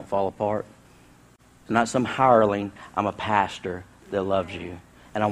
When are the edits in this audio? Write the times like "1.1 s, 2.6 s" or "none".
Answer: 1.7 s